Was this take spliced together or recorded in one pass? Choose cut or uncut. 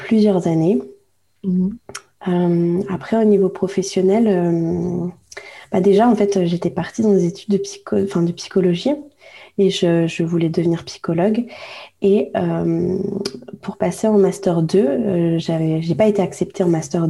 uncut